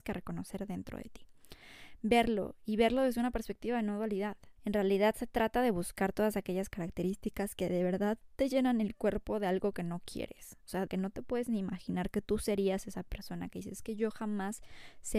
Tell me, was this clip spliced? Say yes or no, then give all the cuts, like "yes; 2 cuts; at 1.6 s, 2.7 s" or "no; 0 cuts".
yes; 2 cuts; at 4.6 s, 10.9 s